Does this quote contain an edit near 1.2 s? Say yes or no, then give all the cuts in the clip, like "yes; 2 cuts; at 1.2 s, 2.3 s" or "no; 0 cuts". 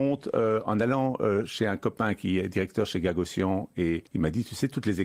no; 1 cut; at 4.1 s